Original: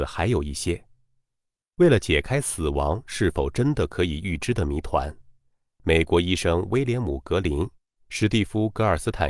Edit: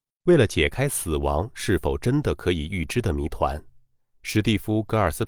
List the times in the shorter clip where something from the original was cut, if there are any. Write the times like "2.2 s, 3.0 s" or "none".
4.1 s